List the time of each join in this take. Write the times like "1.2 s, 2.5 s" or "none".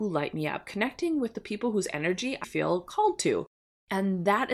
2.4 s